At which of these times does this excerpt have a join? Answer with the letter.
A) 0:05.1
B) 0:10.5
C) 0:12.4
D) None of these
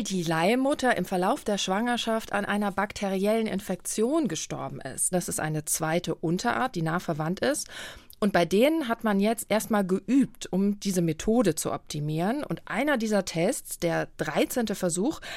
A